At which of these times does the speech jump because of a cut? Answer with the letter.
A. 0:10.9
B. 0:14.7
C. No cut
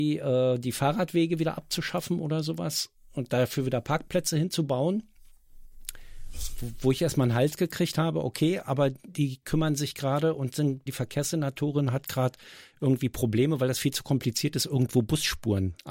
A